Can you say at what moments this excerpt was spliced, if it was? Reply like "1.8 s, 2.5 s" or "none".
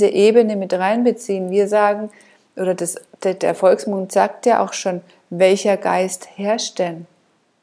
none